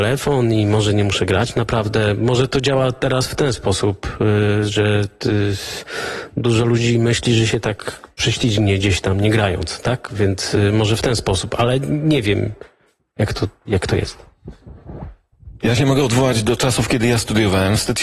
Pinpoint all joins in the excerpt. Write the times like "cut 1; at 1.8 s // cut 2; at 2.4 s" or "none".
none